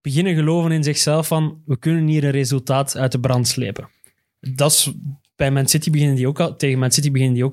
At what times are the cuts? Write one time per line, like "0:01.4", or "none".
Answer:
none